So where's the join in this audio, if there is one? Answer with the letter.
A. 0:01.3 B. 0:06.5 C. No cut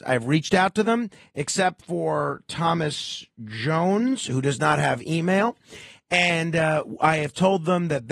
C